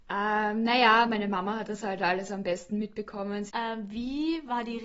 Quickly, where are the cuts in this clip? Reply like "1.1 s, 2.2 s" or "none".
3.5 s